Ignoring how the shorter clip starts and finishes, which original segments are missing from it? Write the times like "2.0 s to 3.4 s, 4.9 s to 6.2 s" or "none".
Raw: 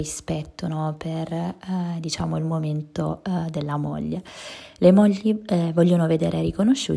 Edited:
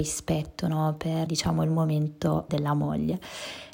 1.3 s to 2.0 s, 3.2 s to 3.5 s